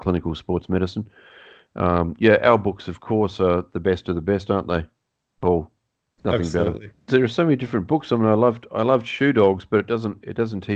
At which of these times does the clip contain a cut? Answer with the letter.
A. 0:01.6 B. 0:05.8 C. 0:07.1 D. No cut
C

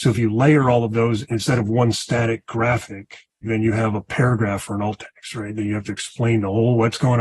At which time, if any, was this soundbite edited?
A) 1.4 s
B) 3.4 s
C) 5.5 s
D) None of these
B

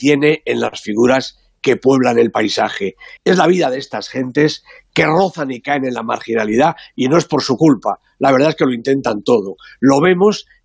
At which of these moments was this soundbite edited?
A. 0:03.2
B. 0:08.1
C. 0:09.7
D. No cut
A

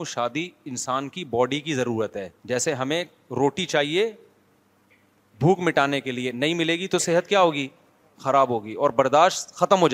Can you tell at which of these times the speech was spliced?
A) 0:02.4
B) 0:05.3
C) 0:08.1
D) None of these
A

